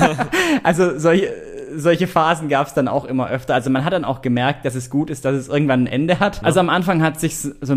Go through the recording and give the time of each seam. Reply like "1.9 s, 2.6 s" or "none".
6.4 s